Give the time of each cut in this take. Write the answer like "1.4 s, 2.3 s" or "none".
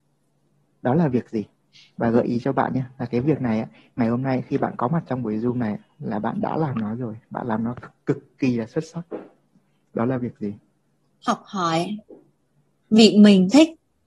none